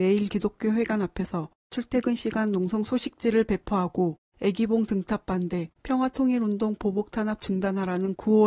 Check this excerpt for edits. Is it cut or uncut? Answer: cut